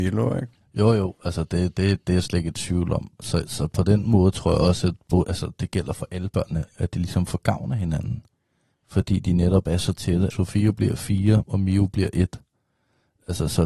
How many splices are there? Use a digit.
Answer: 2